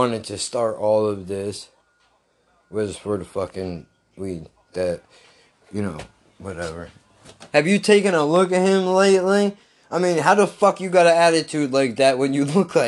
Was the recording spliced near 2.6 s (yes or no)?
no